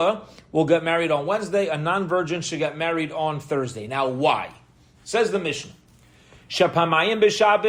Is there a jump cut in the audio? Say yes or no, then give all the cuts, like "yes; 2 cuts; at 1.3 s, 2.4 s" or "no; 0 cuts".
no; 0 cuts